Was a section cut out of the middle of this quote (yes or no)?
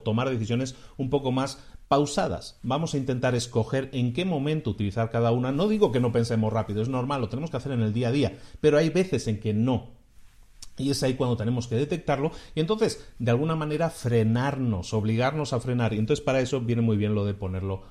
no